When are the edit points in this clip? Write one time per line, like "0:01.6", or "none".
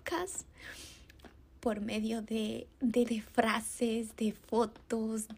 0:03.0